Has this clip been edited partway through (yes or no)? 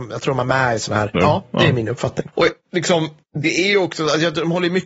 yes